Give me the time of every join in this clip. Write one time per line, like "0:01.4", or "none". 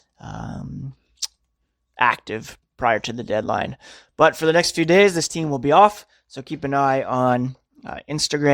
none